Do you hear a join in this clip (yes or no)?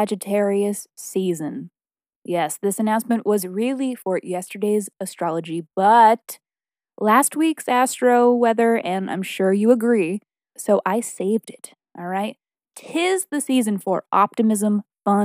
yes